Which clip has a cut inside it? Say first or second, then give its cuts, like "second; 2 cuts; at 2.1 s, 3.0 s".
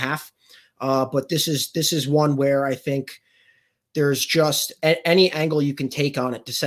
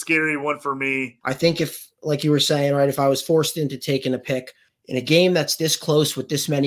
second; 2 cuts; at 1.2 s, 4.7 s